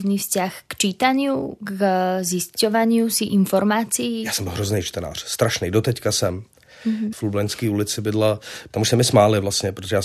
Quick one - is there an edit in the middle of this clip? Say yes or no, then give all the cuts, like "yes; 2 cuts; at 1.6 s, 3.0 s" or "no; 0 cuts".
yes; 2 cuts; at 7.1 s, 8.7 s